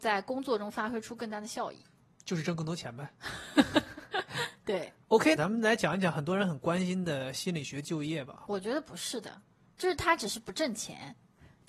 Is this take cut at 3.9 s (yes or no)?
no